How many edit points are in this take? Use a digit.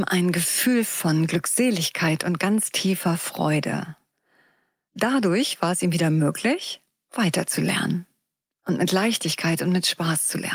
0